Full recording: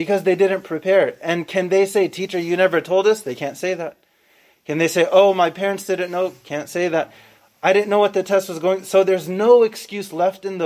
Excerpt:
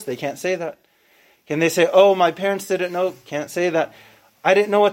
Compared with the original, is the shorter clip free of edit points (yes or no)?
yes